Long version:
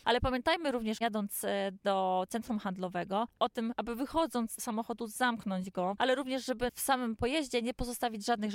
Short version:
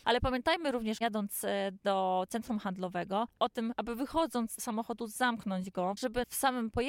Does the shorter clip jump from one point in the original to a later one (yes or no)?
yes